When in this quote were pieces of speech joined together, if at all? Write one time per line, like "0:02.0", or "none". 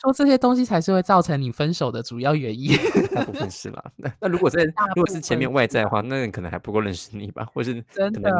0:06.0

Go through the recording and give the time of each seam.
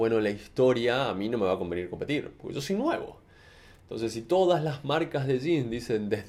none

